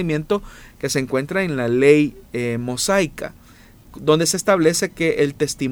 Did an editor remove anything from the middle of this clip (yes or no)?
no